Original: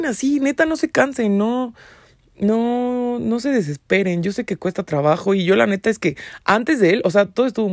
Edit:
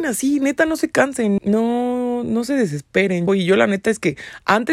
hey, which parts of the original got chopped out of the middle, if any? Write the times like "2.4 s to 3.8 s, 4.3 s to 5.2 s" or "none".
1.4 s to 2.3 s, 4.2 s to 5.3 s